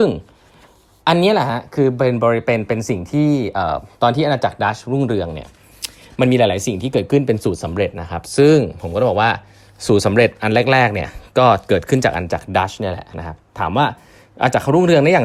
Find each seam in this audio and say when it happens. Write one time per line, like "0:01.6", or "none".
none